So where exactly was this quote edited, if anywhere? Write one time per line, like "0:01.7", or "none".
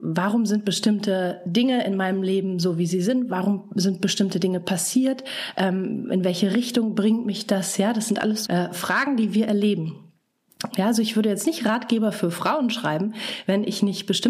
0:08.5
0:10.7

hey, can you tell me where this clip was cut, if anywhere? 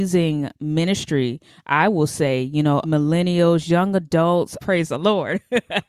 0:02.8
0:04.6

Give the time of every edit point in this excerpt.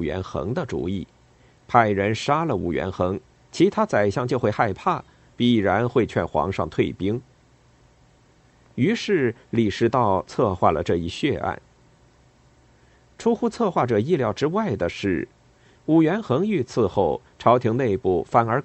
none

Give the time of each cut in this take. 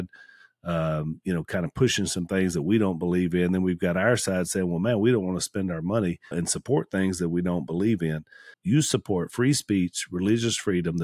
0:06.3
0:08.5

